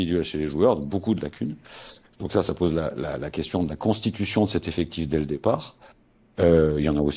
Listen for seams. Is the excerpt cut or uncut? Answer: uncut